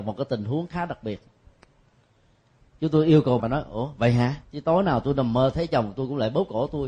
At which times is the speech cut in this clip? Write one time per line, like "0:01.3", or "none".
0:03.4
0:04.4

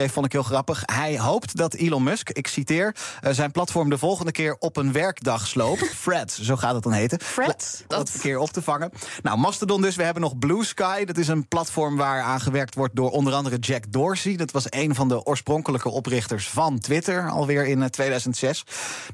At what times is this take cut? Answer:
0:05.9
0:07.9

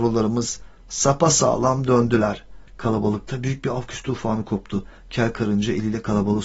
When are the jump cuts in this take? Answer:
0:02.7

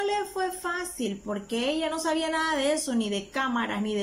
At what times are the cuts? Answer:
none

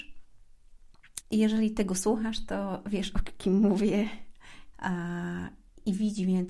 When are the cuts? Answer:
0:01.2
0:04.7

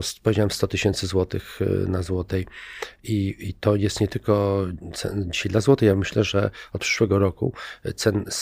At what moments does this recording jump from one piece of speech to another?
none

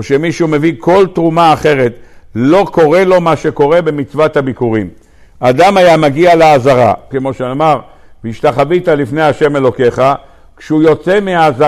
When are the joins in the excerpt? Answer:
0:07.1

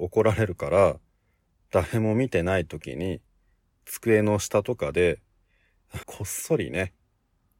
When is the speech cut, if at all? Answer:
0:06.0

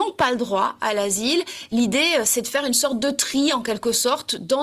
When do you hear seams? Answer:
none

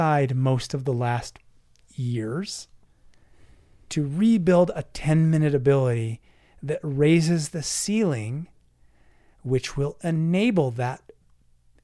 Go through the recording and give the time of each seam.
none

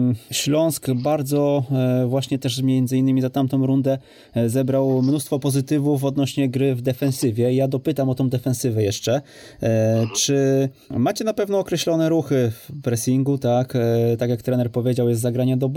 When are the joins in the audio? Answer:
none

